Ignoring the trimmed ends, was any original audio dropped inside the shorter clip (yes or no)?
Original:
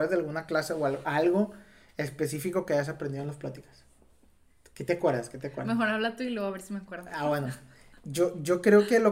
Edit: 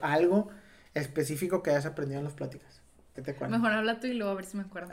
yes